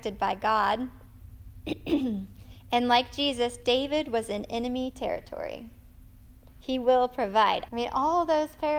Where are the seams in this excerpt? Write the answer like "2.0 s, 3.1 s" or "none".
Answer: 6.5 s, 7.7 s